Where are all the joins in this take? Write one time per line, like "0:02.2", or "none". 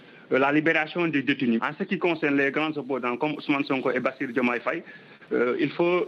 0:01.6